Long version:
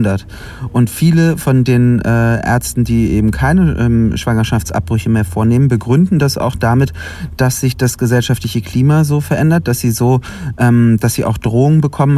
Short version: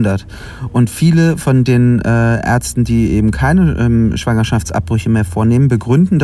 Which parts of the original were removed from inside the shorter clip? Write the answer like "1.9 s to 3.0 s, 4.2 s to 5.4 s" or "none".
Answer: none